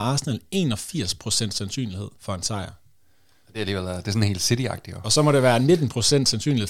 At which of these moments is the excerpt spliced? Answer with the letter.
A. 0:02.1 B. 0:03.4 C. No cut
A